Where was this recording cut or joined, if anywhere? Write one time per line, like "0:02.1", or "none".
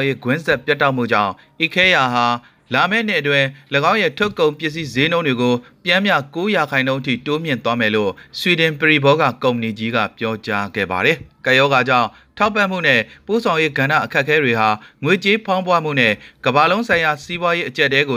none

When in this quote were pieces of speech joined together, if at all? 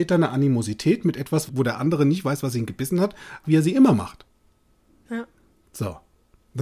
0:01.5
0:03.4

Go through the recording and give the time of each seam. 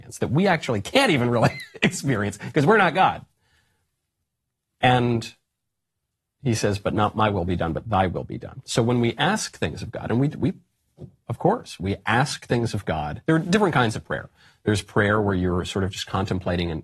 none

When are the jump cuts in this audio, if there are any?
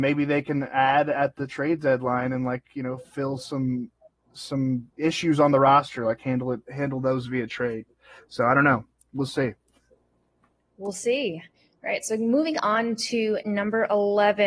0:04.9

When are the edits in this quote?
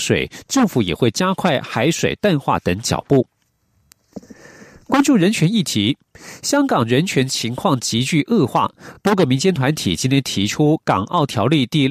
none

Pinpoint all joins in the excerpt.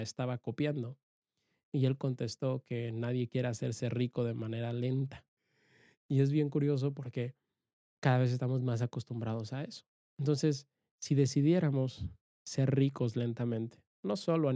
none

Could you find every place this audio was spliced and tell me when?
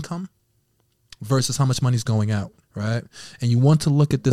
0:02.6

